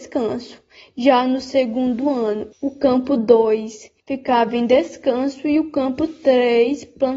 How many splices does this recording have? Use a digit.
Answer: 2